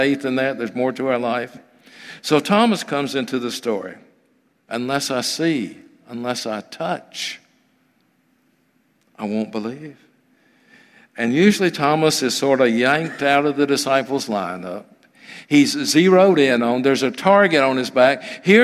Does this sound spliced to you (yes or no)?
yes